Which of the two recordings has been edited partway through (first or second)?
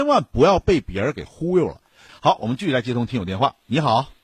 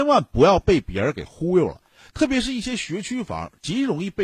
first